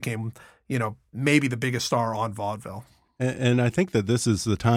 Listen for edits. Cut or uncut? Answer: uncut